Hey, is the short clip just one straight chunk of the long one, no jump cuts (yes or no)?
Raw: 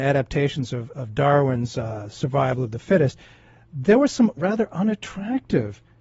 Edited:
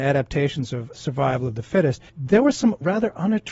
no